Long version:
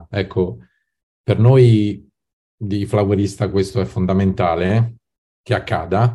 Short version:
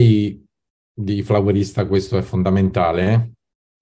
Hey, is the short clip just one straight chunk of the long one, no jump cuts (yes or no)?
yes